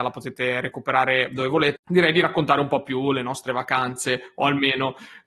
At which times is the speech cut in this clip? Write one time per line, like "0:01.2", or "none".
0:01.8

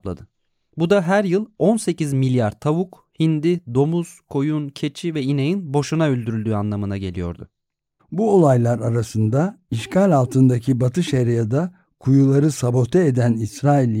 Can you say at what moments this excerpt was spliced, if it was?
0:08.0

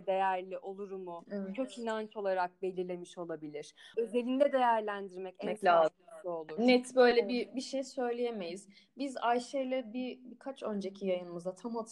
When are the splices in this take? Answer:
0:03.9

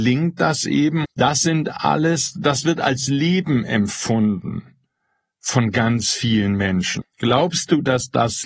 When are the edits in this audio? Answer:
0:01.0
0:07.0

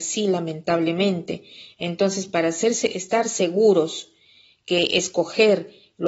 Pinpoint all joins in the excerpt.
none

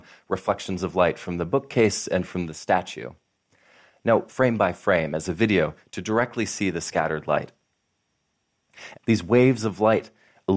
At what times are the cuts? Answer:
0:04.3
0:08.9

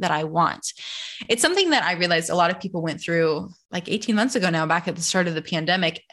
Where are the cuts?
none

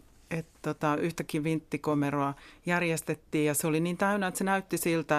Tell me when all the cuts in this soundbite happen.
none

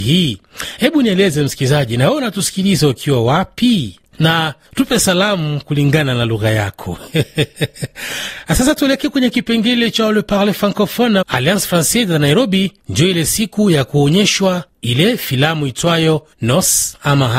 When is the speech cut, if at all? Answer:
0:11.2

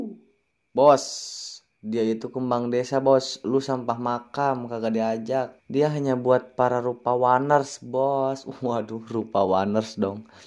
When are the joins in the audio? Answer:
0:05.6

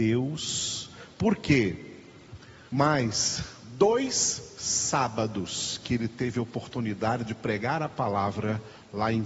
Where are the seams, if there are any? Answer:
0:02.7

